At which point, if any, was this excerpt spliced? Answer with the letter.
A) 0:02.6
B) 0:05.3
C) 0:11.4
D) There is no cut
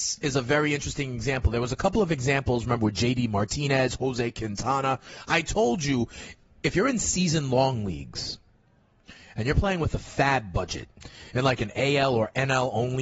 D